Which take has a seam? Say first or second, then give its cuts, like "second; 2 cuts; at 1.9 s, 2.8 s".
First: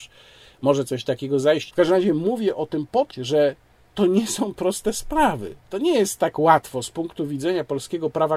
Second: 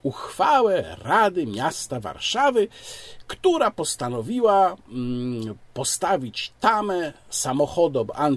first; 2 cuts; at 1.7 s, 3.1 s